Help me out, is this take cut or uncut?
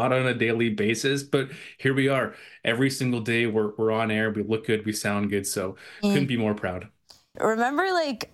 cut